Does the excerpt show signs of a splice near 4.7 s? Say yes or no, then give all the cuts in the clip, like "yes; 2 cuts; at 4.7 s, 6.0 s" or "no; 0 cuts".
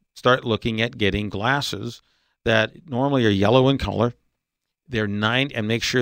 no; 0 cuts